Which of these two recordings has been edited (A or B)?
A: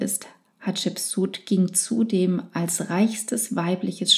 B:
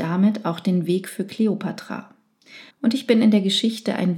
B